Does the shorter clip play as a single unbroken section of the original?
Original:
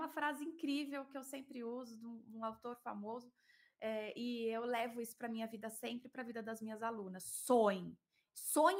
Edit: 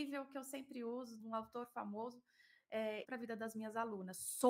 no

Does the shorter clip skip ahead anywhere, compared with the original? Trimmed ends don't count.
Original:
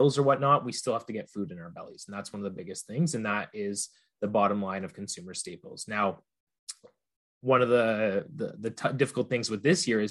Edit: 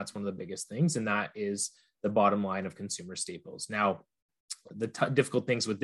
yes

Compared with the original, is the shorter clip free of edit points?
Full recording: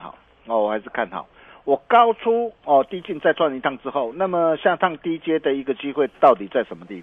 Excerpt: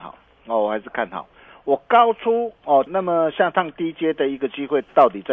no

